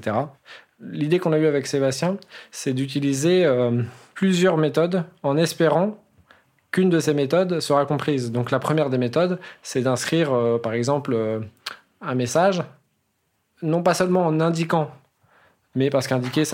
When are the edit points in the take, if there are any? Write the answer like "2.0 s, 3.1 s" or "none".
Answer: none